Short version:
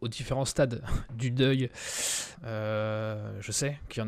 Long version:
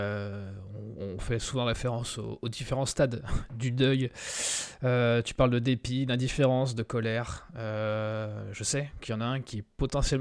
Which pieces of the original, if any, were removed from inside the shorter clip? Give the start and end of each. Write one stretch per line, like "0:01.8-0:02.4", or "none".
0:04.8-0:07.5